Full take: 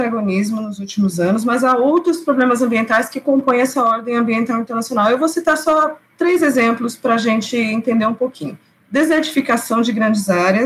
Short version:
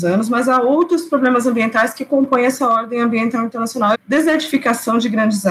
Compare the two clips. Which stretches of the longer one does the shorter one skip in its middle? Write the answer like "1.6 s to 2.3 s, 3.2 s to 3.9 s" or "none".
5.1 s to 8.8 s